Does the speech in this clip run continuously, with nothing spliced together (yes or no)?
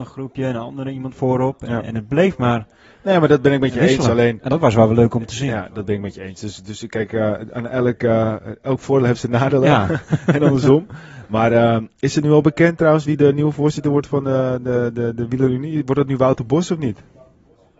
yes